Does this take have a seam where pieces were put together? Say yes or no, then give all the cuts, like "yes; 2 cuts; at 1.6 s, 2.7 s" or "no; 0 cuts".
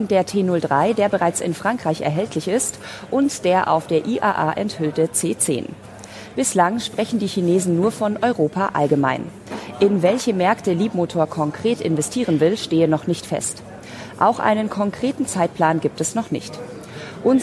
yes; 1 cut; at 6.3 s